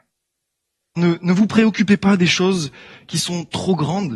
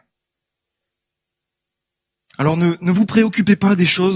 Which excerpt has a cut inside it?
first; 1 cut; at 1.0 s

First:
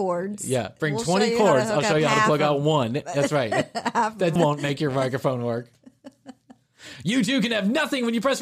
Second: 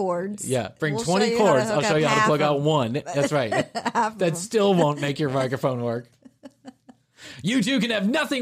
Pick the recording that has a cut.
first; 1 cut; at 4.4 s

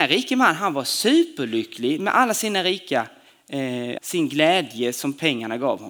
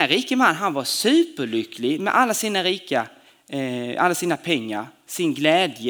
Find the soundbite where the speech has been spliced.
first; 1 cut; at 4.0 s

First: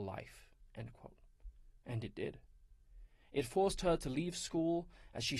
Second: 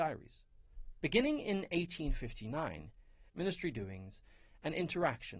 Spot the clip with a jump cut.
second; 2 cuts; at 1.0 s, 3.3 s

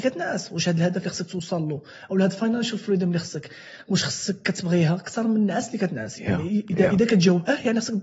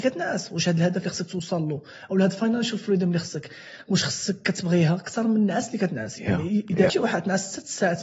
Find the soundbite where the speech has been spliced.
second; 1 cut; at 6.9 s

